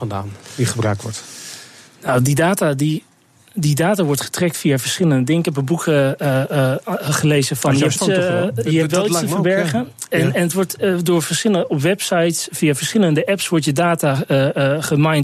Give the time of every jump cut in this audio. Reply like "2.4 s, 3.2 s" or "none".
8.0 s